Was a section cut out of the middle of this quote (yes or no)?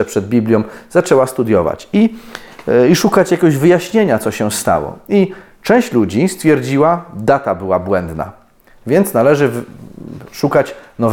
no